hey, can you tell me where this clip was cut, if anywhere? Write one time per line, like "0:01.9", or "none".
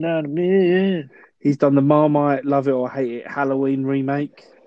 none

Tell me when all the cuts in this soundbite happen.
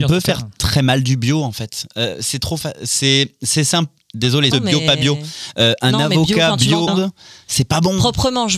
0:04.5
0:06.9

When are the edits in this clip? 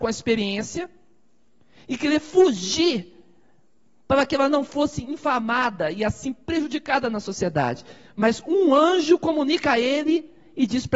none

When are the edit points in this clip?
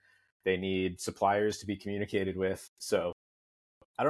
0:02.8

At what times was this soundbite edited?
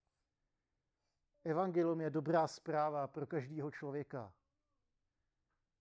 0:01.3

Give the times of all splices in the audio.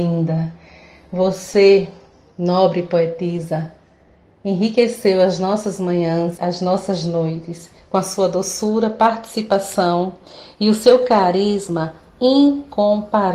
0:06.4

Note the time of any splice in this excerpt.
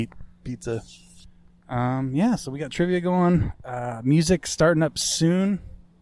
none

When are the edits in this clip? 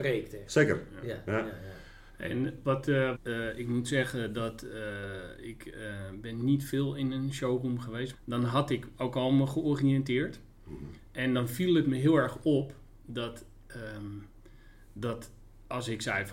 0:03.1
0:08.1

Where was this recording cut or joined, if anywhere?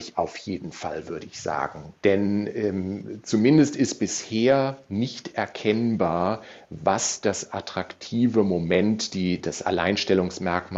none

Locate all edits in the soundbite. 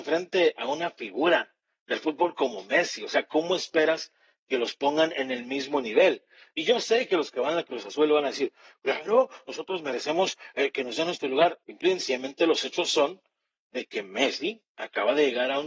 0:11.6

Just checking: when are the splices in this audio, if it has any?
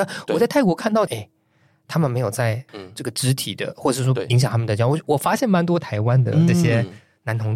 0:01.1
0:02.7

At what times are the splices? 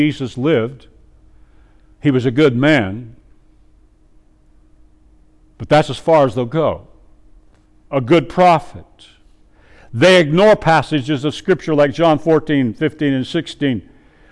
none

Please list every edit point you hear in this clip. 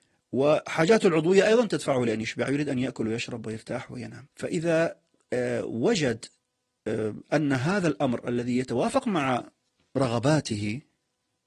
0:04.3

